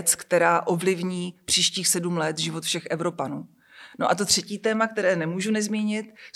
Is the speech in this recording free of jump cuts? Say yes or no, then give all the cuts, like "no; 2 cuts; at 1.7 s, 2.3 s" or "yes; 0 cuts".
yes; 0 cuts